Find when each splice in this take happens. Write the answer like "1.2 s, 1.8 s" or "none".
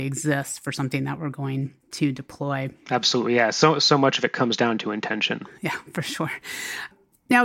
none